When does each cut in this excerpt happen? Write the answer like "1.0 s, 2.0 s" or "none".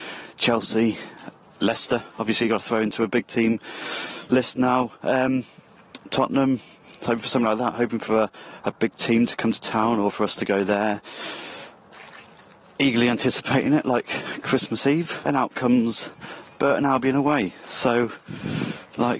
15.2 s

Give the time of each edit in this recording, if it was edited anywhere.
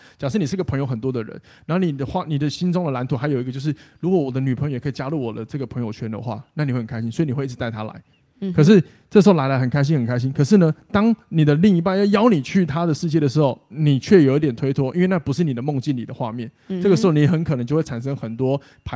none

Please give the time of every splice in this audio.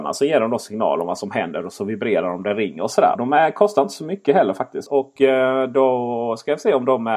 3.2 s, 4.9 s

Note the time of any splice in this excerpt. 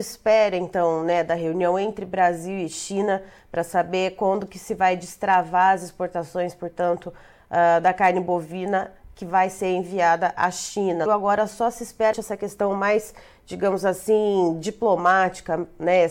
11.1 s, 12.1 s

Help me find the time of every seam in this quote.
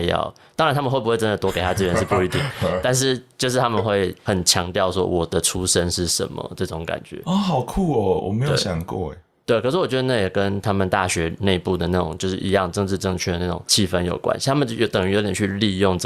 none

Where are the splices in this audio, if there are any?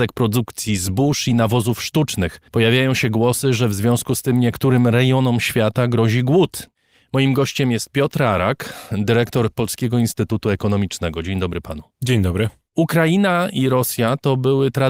2.5 s

